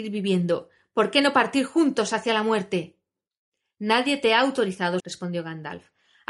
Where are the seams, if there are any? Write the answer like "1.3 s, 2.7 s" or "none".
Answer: 5.0 s